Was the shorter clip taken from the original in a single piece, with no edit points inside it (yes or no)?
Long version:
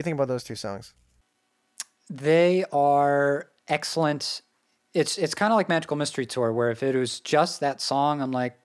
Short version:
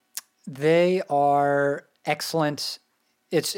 yes